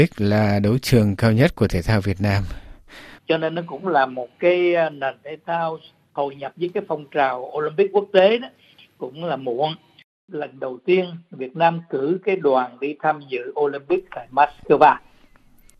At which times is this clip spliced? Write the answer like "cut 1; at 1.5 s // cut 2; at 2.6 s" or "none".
cut 1; at 3.2 s